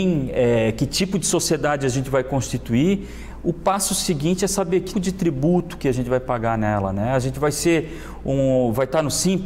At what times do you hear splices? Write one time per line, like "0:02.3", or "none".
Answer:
0:04.9